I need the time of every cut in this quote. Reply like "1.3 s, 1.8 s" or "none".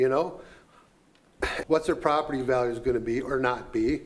1.6 s